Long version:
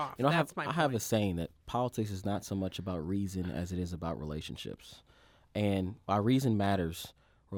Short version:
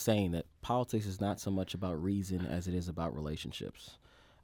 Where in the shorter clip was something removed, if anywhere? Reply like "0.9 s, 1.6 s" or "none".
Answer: none